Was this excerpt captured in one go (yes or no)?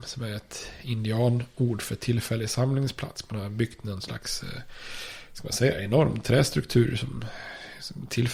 yes